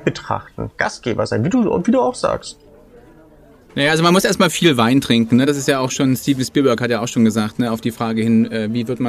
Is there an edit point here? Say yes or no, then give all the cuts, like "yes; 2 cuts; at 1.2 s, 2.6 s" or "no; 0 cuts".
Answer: no; 0 cuts